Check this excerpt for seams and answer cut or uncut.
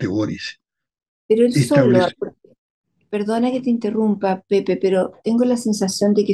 uncut